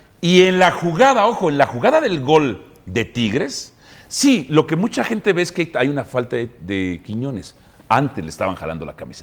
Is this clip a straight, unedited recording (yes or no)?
yes